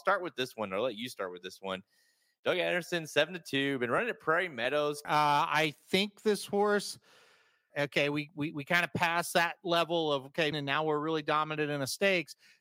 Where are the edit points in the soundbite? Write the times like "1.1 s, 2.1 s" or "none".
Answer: 5.0 s, 7.7 s, 10.5 s